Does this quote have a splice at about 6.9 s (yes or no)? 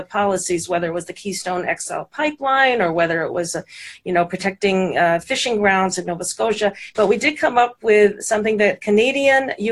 yes